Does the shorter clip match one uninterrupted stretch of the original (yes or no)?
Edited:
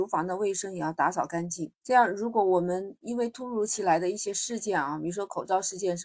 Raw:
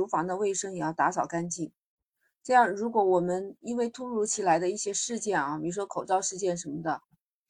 no